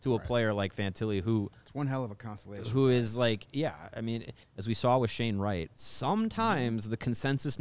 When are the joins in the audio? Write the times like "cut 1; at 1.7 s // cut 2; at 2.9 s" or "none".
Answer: cut 1; at 4.4 s // cut 2; at 5.7 s

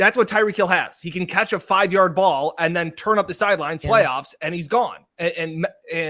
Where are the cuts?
cut 1; at 3.8 s

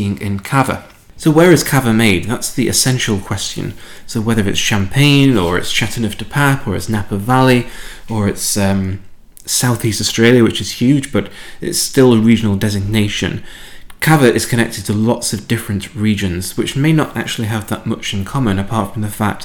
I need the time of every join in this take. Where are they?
cut 1; at 4.0 s

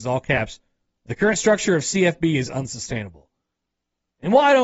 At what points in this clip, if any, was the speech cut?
none

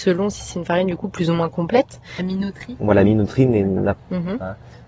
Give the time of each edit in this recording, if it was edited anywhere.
cut 1; at 2.2 s // cut 2; at 4.0 s

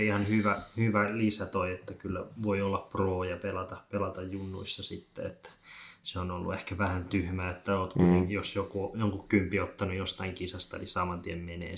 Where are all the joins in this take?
none

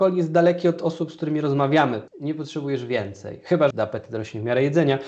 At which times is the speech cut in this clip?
cut 1; at 2.1 s // cut 2; at 3.7 s

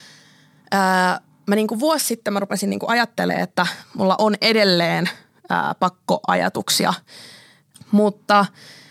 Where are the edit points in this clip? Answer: cut 1; at 7.7 s

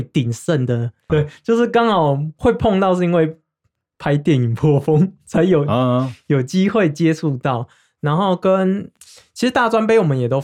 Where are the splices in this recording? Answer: cut 1; at 1.1 s

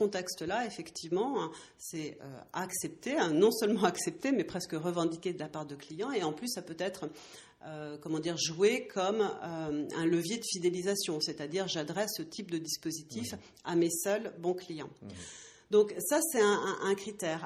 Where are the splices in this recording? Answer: none

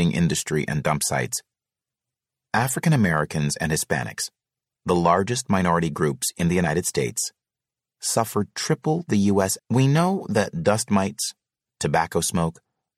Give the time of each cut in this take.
cut 1; at 9.6 s // cut 2; at 11.7 s

